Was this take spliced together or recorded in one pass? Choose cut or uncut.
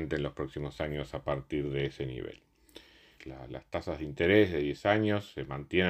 cut